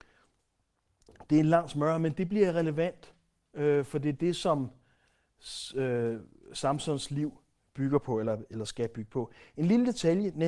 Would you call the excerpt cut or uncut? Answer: uncut